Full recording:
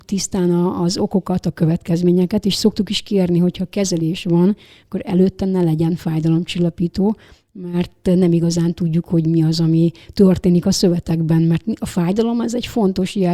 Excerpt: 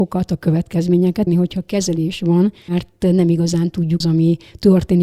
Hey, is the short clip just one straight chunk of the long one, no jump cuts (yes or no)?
no